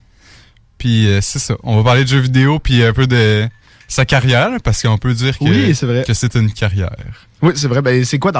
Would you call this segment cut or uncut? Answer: uncut